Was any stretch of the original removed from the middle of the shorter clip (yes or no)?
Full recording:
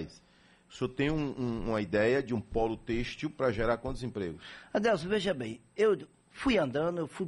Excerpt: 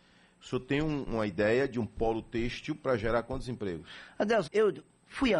yes